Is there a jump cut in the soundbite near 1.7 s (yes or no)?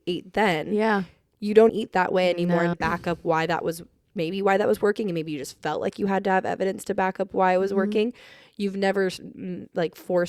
yes